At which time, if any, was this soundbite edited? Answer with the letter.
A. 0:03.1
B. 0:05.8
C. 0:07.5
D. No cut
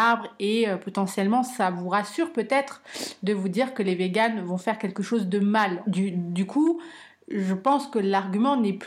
B